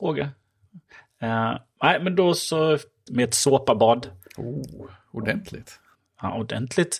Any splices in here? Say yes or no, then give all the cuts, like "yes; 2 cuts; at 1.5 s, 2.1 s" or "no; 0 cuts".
yes; 1 cut; at 3.1 s